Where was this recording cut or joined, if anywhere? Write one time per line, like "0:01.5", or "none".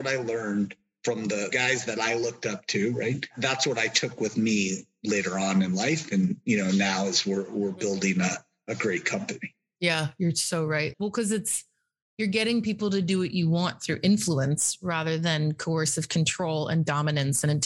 0:10.9